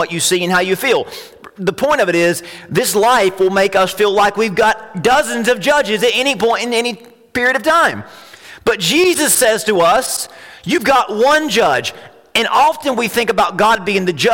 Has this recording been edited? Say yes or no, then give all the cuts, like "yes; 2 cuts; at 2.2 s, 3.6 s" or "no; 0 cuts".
no; 0 cuts